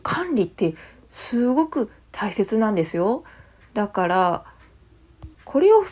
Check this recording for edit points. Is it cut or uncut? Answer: cut